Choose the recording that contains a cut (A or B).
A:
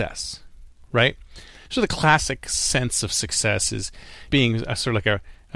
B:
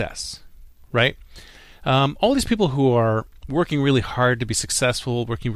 A